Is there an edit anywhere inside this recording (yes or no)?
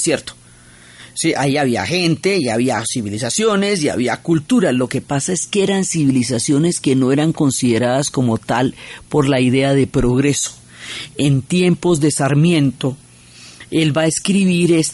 no